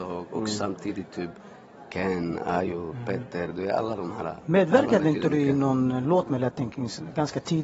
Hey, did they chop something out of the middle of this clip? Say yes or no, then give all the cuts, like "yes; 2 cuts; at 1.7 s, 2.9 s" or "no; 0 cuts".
yes; 1 cut; at 4.4 s